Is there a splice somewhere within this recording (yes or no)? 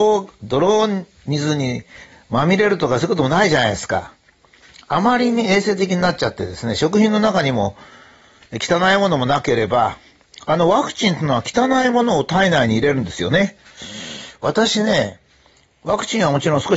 no